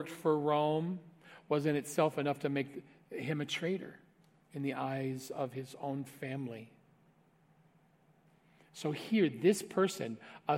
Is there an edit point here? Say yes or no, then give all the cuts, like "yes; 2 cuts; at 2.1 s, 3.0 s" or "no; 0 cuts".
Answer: no; 0 cuts